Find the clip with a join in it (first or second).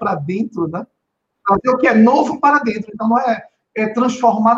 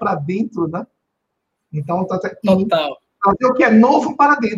first